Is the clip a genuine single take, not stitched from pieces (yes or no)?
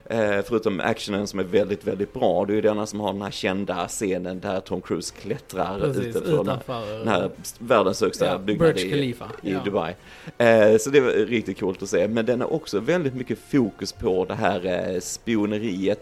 no